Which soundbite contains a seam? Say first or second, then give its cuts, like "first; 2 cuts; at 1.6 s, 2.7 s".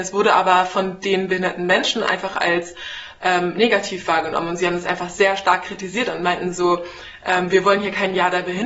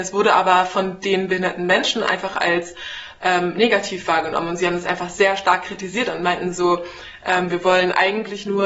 second; 1 cut; at 7.5 s